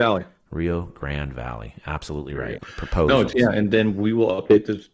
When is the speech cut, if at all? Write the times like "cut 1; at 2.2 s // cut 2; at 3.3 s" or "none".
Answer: cut 1; at 2.6 s